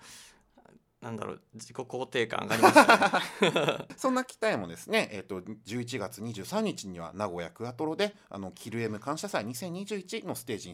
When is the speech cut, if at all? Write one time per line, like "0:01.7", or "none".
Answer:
0:03.9